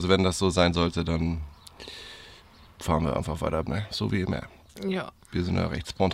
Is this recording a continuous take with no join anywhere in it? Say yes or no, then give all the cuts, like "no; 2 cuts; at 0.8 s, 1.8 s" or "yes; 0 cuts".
no; 1 cut; at 3.7 s